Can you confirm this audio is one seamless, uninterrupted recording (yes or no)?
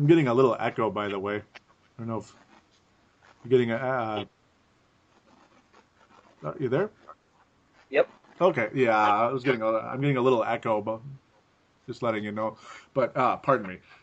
yes